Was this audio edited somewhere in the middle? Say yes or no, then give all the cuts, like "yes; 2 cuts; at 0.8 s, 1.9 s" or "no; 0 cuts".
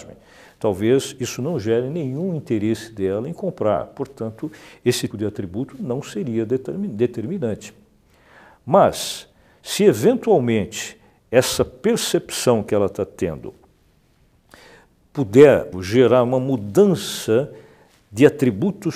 yes; 2 cuts; at 5.1 s, 15.7 s